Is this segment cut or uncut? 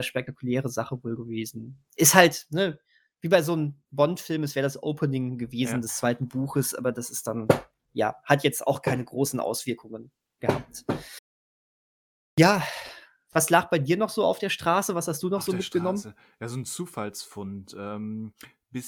uncut